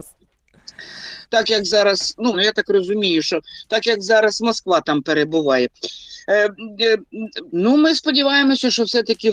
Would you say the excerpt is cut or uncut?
cut